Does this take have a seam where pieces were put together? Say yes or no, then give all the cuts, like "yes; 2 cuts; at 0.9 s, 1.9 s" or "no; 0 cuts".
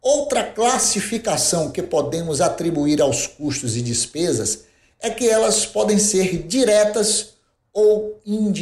no; 0 cuts